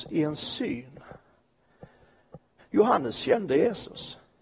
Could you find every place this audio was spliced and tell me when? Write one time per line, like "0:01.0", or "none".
0:02.6